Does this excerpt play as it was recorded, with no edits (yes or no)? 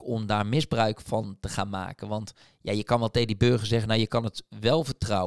yes